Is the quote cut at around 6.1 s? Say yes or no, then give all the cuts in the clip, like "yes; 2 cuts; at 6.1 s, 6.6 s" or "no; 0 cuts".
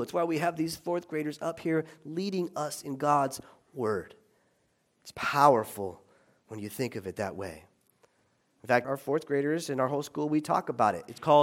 no; 1 cut; at 8.8 s